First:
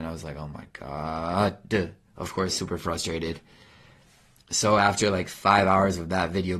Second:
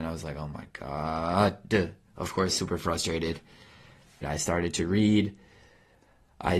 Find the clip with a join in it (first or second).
second